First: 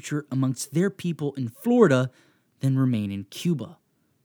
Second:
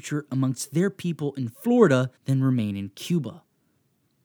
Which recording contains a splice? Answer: second; 1 cut; at 2.2 s

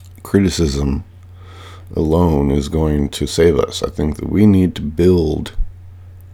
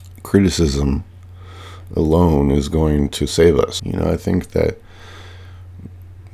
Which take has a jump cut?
second; 1 cut; at 3.8 s

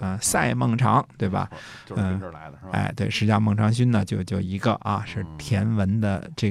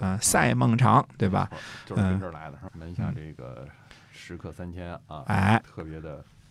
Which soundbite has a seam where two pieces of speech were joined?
second; 1 cut; at 2.7 s

